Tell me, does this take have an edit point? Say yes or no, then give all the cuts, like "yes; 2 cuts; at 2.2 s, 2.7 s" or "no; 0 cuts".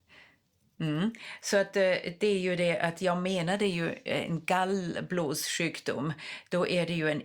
no; 0 cuts